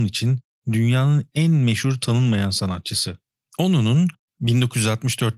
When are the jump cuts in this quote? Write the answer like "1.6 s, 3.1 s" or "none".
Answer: 3.5 s